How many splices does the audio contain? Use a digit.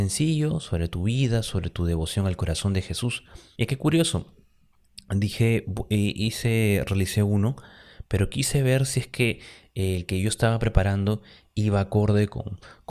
1